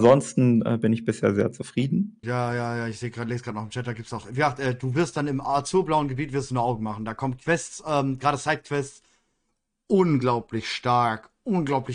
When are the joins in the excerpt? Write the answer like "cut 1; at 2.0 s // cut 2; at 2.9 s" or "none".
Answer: cut 1; at 2.2 s

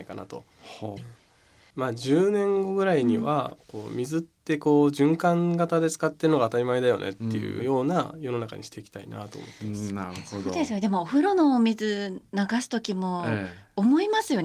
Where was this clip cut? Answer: cut 1; at 1.0 s

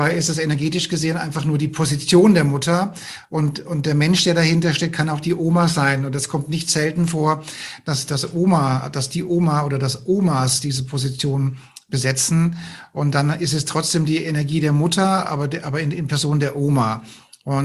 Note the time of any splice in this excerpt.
none

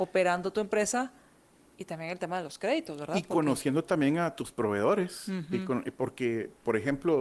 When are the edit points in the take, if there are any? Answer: none

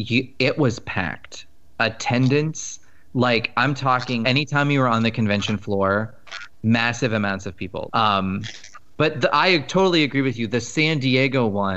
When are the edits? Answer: cut 1; at 4.2 s // cut 2; at 7.9 s

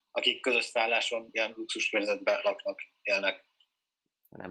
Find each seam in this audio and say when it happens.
none

